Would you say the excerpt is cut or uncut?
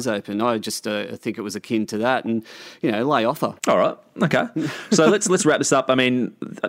cut